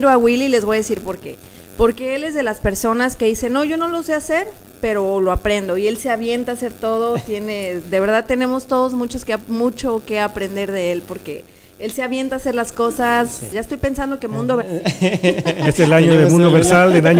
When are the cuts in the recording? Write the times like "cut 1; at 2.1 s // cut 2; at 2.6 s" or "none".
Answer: cut 1; at 13.5 s // cut 2; at 14.6 s